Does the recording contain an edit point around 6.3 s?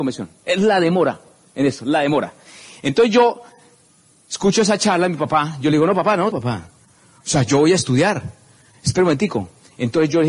yes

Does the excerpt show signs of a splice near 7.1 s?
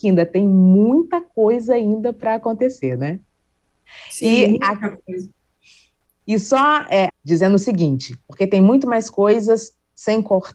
yes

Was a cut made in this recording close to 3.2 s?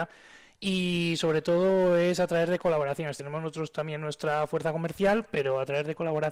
no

